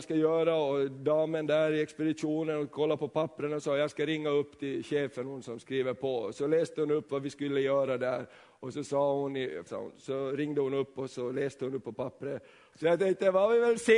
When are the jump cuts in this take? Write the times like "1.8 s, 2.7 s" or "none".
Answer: 9.7 s, 12.7 s

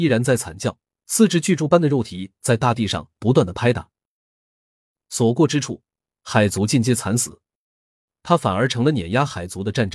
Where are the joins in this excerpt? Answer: 8.1 s

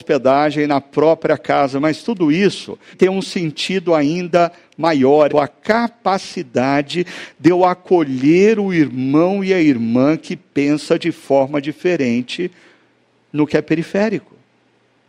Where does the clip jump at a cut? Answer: 2.9 s, 5.3 s

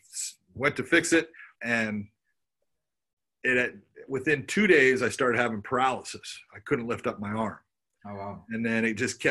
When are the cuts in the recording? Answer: 1.6 s

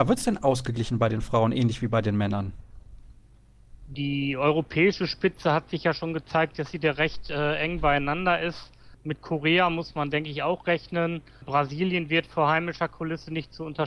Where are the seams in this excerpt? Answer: 3.8 s

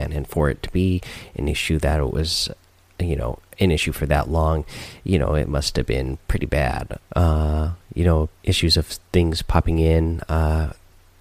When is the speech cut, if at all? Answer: 7.1 s, 8.4 s

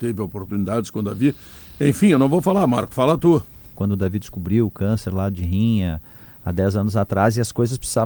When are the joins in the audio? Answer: 3.7 s

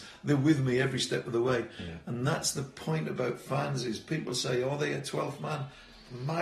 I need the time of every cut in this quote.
none

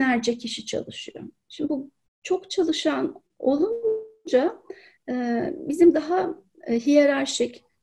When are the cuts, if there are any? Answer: none

